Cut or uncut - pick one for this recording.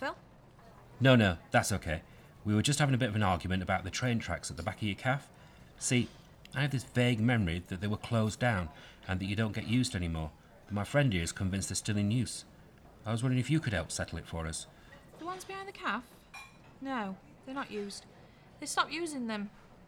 cut